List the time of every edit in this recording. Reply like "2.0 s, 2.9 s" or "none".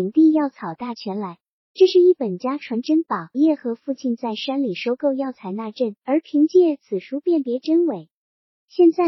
3.3 s